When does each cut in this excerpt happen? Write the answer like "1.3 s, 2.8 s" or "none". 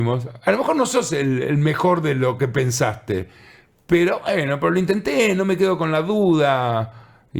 none